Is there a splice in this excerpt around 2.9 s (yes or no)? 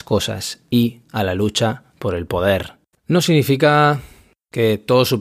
yes